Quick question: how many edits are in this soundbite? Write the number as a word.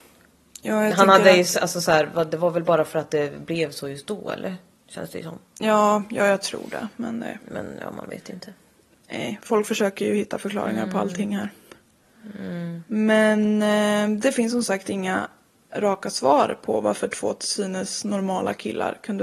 zero